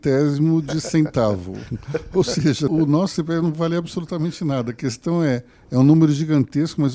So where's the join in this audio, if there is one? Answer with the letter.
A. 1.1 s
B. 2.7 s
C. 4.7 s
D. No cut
B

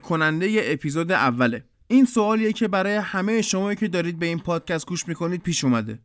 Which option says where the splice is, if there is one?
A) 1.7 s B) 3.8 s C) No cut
A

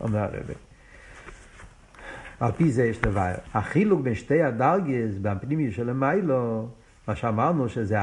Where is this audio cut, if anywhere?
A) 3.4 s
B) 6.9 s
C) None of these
A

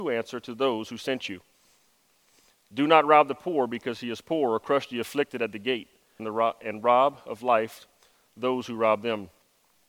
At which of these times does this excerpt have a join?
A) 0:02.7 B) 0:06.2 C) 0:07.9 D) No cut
B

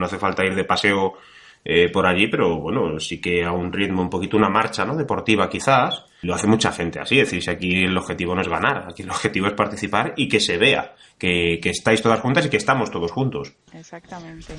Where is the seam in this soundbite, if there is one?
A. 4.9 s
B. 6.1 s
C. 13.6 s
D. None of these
D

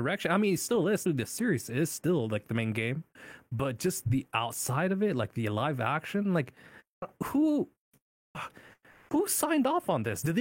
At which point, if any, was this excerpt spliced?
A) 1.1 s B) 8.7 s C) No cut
A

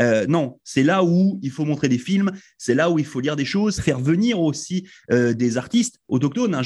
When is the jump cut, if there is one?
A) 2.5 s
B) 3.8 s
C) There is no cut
B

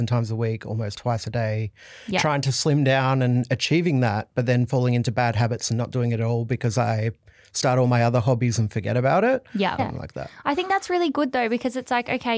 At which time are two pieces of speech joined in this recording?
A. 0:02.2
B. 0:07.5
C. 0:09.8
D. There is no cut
C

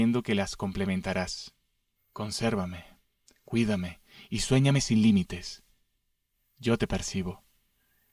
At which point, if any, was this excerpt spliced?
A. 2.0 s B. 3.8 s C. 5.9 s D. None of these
A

